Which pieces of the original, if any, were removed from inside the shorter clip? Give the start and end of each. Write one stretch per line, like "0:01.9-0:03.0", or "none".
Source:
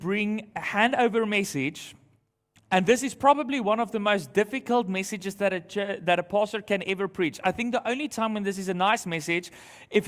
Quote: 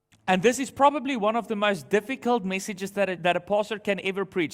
0:05.6-0:06.0